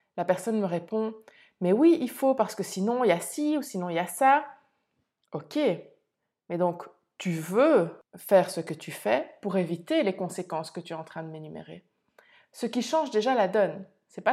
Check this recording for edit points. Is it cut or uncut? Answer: uncut